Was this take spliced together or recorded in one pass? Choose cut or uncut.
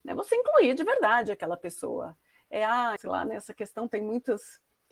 cut